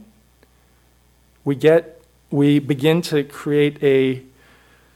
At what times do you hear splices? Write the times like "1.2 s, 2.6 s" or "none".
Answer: none